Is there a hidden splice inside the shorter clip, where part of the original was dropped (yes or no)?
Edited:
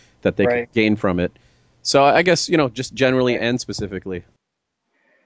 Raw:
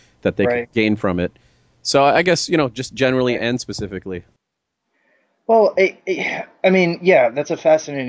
no